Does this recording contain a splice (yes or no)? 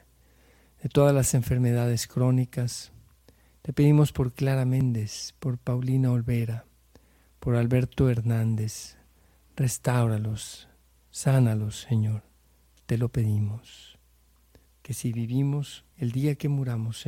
yes